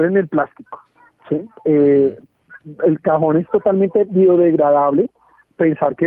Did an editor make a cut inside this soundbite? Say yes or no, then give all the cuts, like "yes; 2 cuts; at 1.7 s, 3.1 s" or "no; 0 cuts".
yes; 1 cut; at 3.0 s